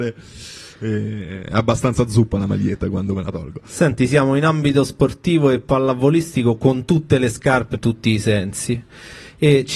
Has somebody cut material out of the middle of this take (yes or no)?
yes